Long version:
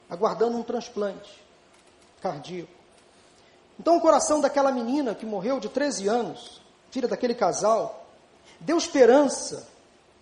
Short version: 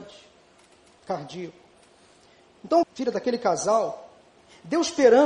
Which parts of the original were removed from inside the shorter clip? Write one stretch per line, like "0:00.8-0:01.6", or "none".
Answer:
0:04.0-0:06.8